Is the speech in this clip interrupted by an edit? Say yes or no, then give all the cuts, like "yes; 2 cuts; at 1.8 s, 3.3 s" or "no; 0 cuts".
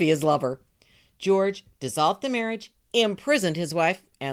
no; 0 cuts